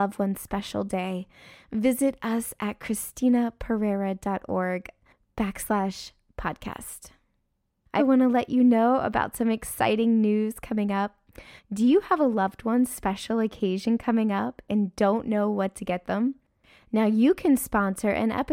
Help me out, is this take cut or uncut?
cut